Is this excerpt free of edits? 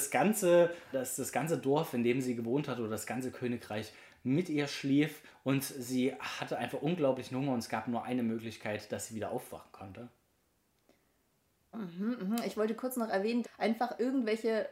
no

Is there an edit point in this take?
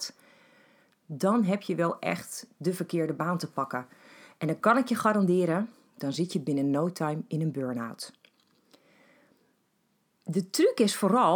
no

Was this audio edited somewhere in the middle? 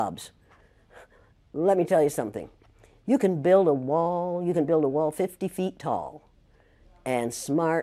no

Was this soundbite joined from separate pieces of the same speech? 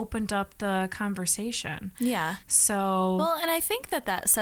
no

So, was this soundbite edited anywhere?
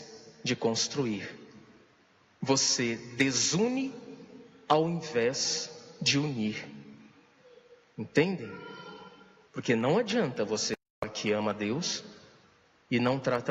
yes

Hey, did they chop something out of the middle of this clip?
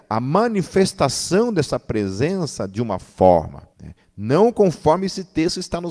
yes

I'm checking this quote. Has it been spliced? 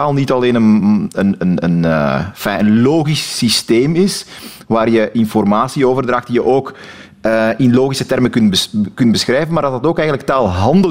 no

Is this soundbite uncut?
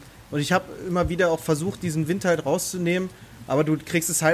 yes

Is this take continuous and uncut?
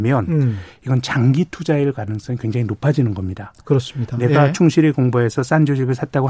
yes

